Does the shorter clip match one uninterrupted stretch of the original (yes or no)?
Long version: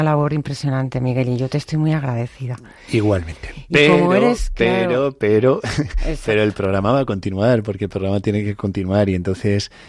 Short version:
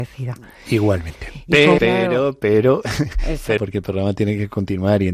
no